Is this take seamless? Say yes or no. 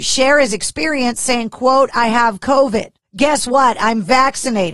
yes